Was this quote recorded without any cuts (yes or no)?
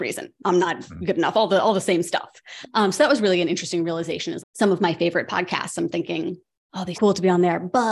no